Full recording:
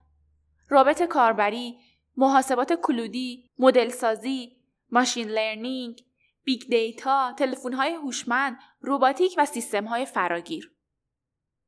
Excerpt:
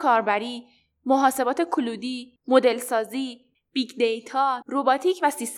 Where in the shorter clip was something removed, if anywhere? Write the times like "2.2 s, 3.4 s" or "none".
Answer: 3.5 s, 4.6 s